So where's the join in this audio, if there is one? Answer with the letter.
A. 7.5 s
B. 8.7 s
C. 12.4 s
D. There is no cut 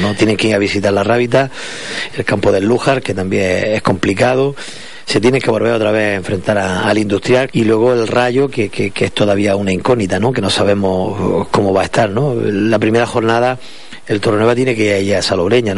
A